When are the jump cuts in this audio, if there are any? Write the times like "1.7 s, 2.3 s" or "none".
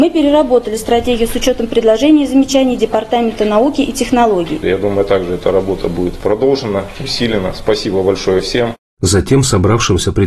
4.6 s